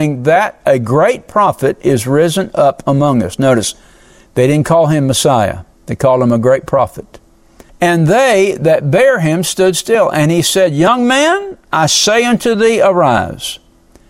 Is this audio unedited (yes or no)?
no